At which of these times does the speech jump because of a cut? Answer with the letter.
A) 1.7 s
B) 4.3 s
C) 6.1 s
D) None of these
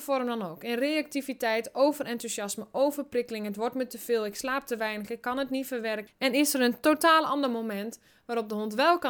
C